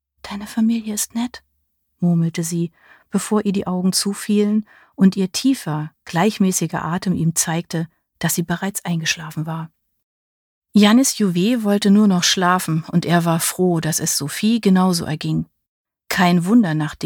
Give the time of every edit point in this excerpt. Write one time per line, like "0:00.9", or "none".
none